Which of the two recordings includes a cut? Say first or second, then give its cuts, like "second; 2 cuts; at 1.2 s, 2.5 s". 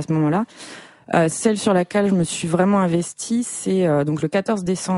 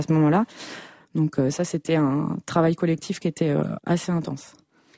second; 2 cuts; at 1.0 s, 3.8 s